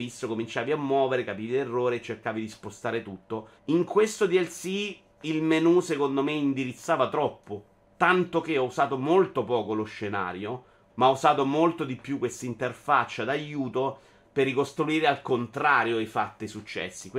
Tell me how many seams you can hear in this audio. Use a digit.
2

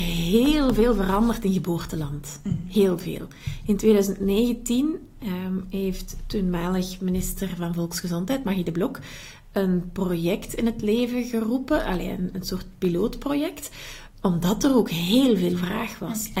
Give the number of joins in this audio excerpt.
1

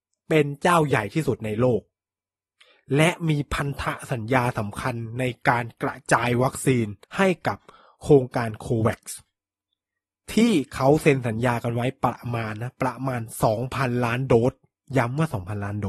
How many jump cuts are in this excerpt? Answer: 1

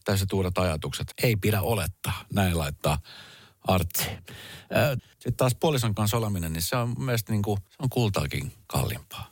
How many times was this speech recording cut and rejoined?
2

